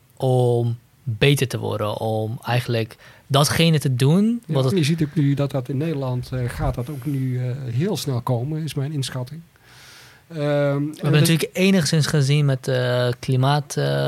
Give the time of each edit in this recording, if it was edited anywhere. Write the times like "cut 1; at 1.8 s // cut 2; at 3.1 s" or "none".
cut 1; at 4.7 s